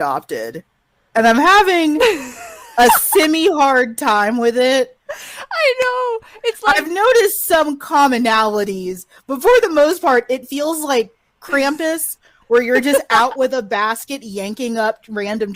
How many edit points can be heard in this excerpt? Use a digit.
0